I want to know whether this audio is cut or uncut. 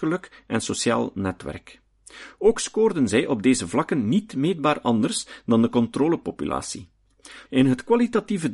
cut